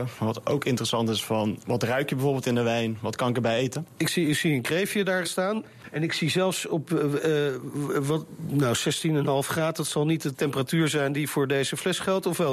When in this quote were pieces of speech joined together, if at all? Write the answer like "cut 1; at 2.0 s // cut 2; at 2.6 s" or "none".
cut 1; at 5.2 s